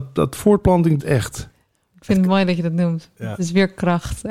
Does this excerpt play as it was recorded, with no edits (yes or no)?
no